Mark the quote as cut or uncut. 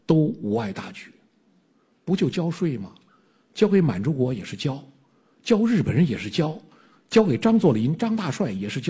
uncut